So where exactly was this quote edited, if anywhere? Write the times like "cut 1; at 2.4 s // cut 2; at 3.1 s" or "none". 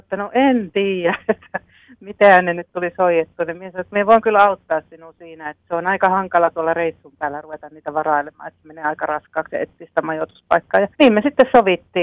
cut 1; at 10.9 s